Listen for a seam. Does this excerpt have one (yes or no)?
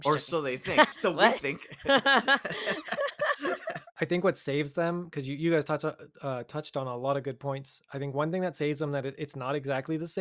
yes